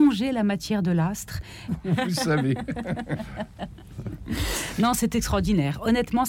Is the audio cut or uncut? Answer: cut